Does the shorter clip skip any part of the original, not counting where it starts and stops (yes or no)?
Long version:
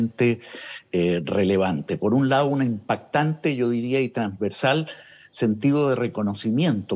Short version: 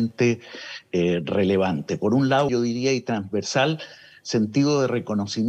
yes